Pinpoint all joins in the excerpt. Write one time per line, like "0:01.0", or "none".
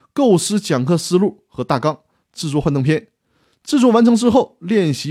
none

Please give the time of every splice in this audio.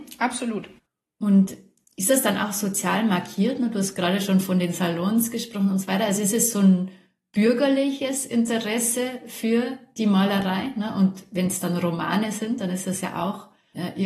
none

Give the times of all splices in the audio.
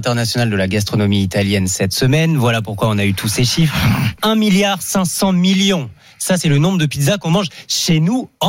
none

